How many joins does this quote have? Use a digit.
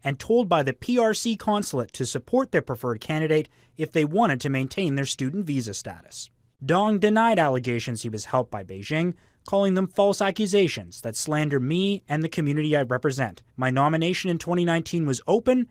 1